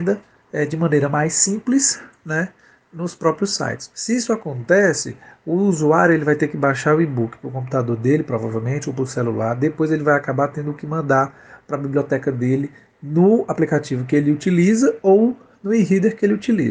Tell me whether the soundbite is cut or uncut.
cut